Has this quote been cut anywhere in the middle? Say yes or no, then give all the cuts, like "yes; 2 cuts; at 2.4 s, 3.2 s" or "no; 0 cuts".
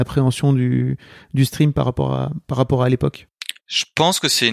yes; 1 cut; at 3.6 s